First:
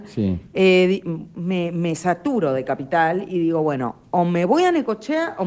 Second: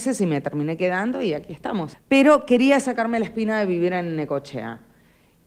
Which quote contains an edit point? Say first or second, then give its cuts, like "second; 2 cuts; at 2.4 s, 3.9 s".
second; 1 cut; at 1.9 s